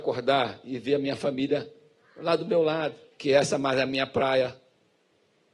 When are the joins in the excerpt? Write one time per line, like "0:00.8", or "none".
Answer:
0:03.1